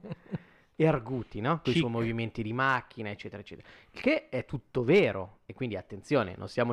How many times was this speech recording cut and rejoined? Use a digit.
1